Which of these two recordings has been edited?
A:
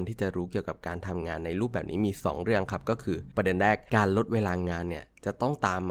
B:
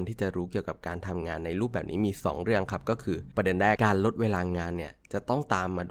B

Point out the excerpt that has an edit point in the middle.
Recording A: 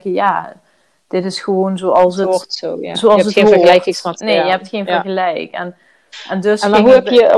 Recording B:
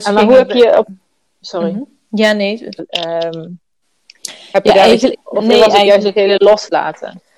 B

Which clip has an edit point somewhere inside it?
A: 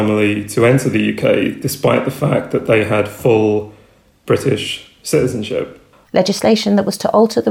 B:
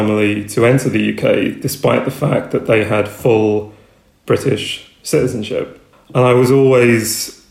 A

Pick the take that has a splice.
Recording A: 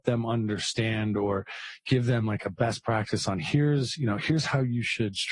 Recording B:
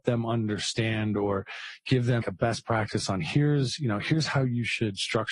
B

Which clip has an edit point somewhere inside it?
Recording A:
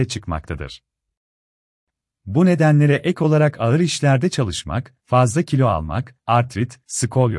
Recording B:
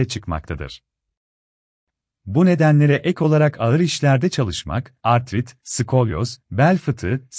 B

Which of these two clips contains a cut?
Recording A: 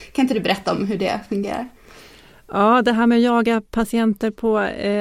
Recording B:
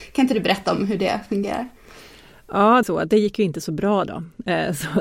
B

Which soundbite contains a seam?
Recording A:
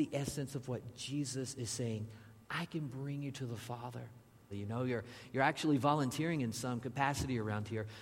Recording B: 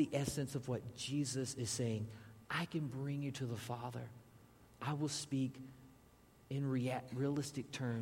A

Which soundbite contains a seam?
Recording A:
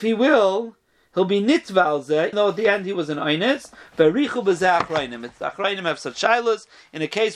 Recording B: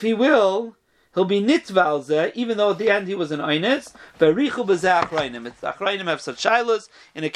A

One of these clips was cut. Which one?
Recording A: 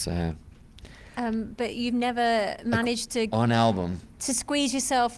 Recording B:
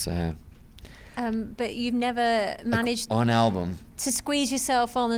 B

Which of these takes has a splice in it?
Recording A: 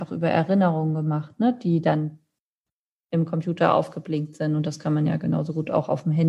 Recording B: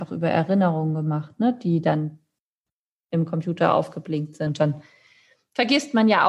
B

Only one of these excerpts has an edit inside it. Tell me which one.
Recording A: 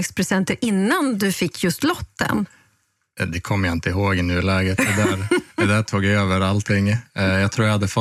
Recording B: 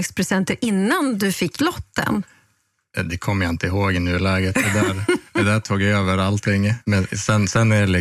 B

